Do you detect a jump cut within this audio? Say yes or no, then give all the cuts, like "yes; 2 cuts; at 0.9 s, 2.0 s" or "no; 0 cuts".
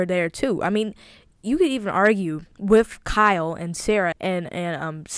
yes; 2 cuts; at 2.5 s, 4.1 s